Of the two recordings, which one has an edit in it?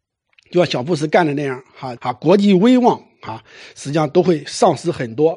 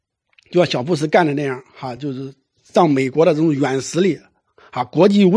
first; 1 cut; at 2.0 s

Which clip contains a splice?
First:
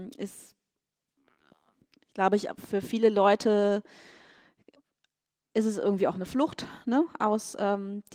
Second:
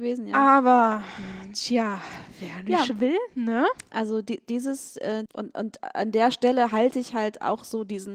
second; 2 cuts; at 3.9 s, 5.3 s

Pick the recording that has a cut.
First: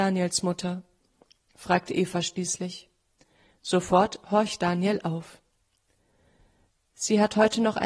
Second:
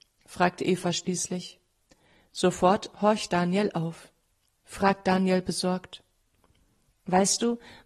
second; 1 cut; at 4.6 s

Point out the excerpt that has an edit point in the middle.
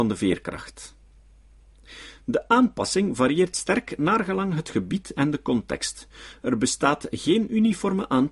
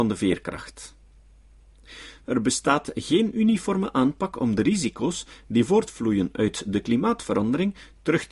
second; 1 cut; at 2.2 s

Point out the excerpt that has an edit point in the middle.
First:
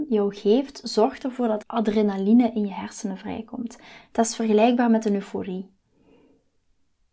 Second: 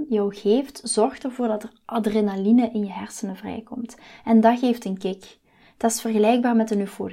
first; 2 cuts; at 1.6 s, 4.0 s

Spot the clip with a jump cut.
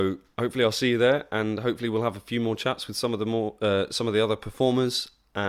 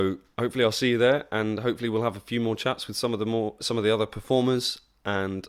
second; 1 cut; at 3.6 s

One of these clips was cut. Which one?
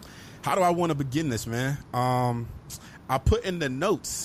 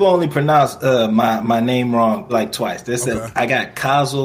second; 1 cut; at 2.3 s

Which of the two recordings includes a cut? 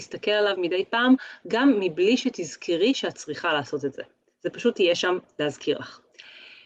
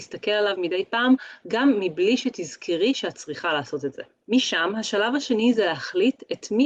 second; 1 cut; at 4.3 s

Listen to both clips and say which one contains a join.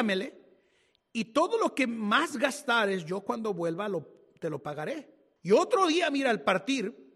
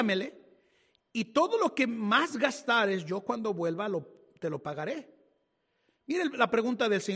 first; 1 cut; at 5.4 s

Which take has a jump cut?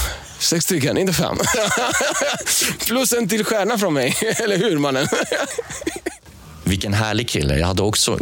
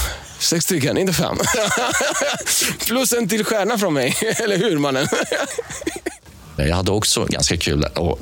second; 1 cut; at 6.6 s

